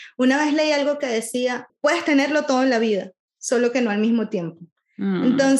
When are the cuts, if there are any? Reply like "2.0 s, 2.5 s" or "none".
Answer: 1.7 s